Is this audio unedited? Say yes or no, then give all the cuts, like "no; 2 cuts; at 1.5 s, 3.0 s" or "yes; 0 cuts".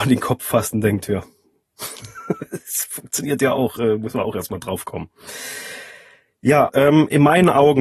no; 1 cut; at 6.7 s